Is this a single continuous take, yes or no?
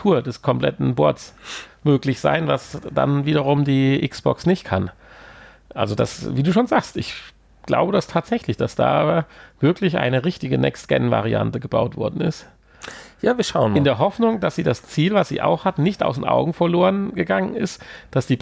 yes